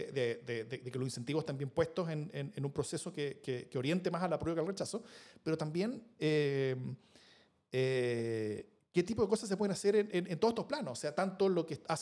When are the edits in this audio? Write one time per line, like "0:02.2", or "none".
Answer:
none